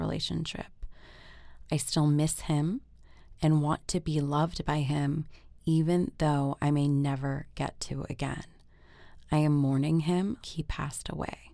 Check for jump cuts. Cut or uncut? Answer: cut